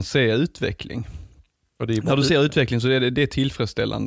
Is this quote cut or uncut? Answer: uncut